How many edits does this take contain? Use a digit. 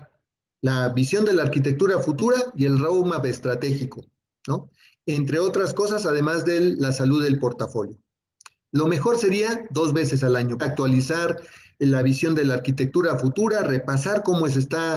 2